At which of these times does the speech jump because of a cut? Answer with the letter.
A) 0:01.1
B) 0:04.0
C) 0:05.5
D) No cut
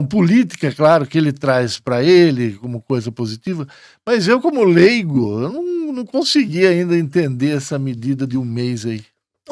D